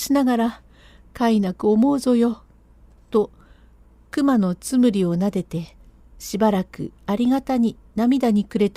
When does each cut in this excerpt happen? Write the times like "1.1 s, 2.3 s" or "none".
none